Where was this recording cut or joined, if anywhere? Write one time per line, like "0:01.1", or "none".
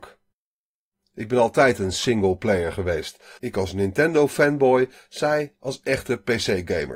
0:03.4